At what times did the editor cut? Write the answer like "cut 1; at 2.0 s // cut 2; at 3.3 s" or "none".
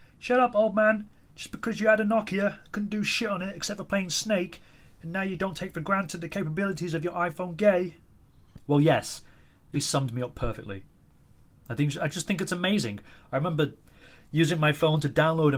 cut 1; at 9.7 s